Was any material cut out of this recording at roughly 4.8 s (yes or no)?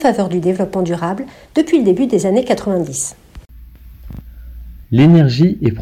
yes